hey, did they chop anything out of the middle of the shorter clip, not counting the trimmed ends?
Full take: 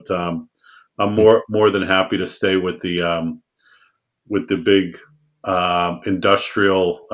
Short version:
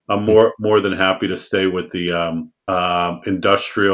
yes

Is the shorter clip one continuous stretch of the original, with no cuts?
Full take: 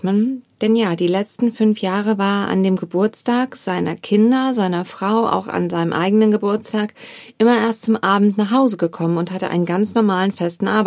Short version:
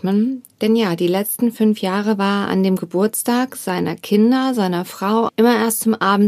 no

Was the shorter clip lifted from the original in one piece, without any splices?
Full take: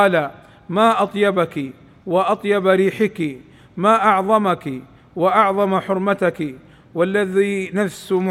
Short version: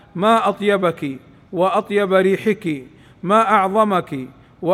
yes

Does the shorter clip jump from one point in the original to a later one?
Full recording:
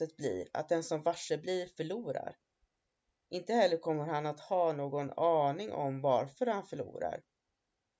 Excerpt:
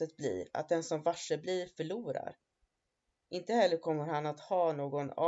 no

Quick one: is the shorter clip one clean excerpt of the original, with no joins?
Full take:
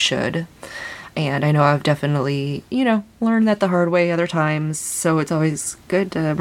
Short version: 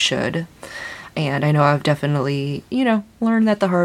yes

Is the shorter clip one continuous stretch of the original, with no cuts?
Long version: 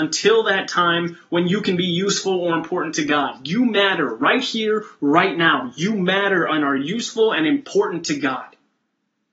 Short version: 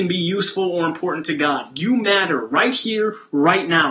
yes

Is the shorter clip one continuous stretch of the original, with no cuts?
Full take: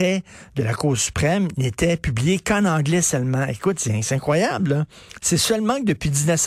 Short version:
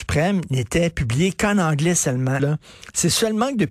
no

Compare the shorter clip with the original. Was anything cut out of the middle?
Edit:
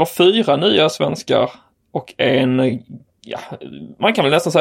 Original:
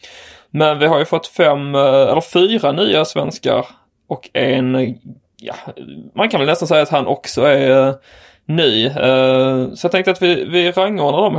no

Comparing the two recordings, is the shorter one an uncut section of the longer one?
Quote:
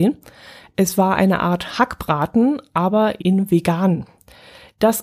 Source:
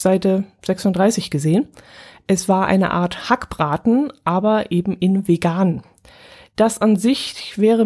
no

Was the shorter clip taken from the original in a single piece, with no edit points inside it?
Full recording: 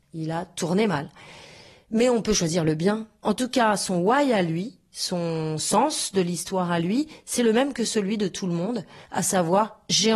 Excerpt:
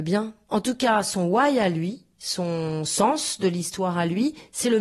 yes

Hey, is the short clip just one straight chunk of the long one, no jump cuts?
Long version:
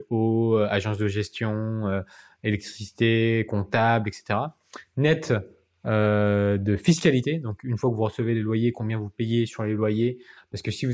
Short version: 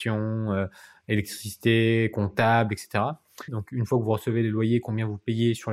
no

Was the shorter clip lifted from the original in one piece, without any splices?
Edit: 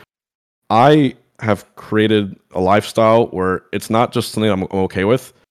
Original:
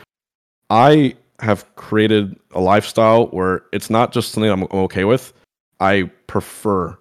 yes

